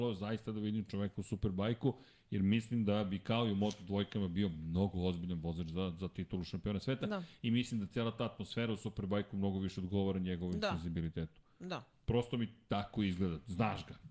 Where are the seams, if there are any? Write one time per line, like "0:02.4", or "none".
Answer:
none